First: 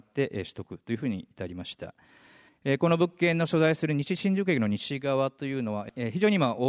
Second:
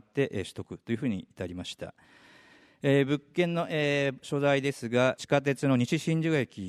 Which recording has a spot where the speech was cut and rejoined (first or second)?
first